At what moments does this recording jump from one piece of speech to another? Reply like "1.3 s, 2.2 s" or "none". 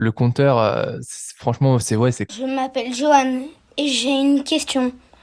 2.3 s